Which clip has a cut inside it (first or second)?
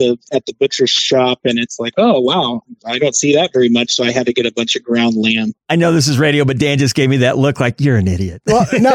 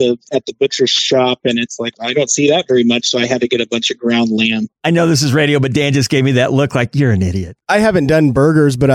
second